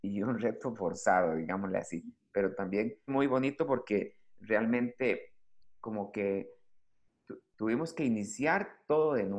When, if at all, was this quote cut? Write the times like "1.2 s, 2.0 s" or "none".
3.1 s

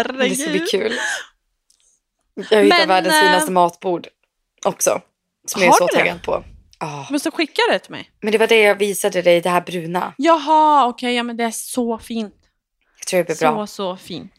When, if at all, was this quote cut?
none

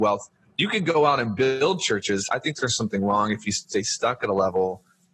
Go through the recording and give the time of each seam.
none

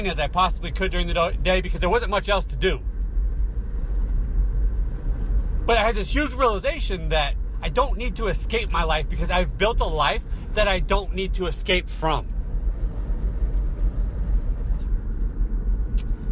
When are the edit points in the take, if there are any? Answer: 14.8 s

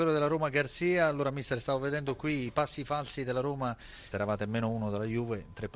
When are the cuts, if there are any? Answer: 4.1 s

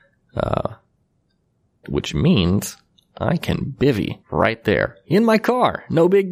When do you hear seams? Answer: 1.8 s, 4.2 s

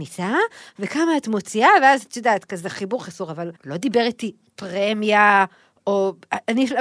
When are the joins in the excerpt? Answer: 3.6 s

